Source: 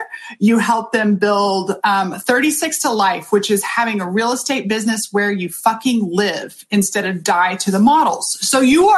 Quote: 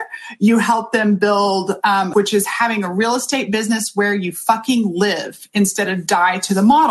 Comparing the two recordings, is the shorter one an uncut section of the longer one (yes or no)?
no